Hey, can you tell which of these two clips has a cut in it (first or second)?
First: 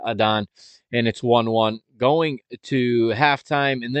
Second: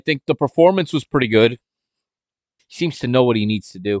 second